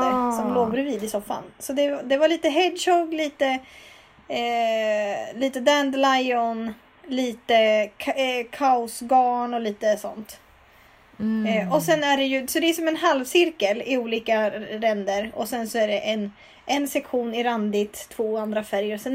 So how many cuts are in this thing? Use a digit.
0